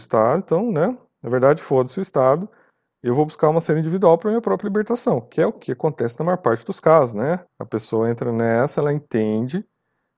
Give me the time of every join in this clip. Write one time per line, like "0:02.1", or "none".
0:07.5